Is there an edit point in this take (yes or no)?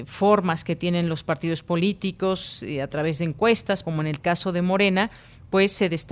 yes